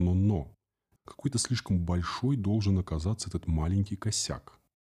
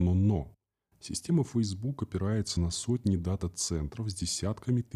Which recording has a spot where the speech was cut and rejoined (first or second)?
first